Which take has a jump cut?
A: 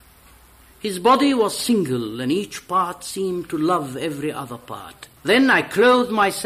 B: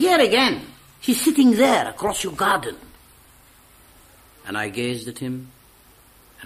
A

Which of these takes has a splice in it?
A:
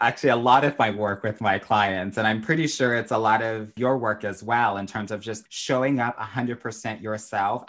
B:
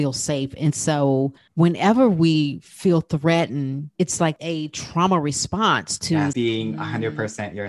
B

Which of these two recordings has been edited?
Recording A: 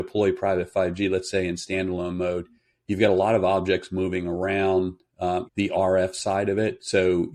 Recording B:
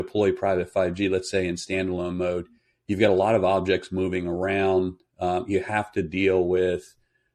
A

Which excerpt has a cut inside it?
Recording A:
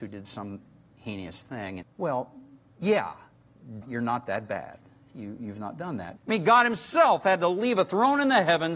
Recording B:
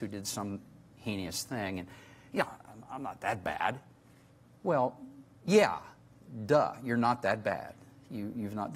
A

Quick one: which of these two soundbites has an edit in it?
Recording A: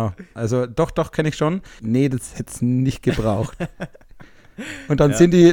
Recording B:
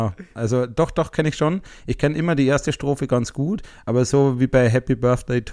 A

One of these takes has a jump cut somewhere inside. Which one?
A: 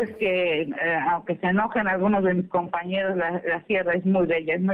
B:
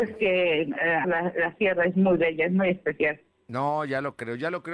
B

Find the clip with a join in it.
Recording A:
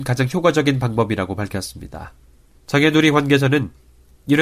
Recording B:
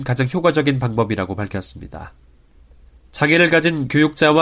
A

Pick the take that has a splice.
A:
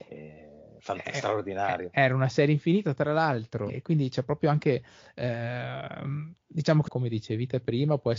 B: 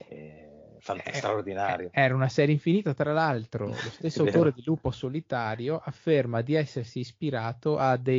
A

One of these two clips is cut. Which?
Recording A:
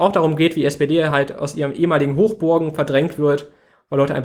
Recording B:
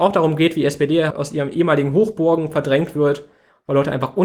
B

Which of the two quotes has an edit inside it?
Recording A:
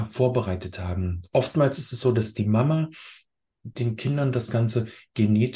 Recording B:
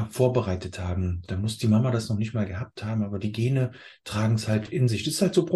B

